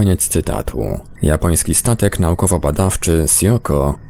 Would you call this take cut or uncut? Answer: cut